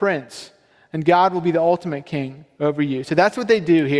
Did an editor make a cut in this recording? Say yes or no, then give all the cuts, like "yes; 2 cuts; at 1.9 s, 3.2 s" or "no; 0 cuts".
no; 0 cuts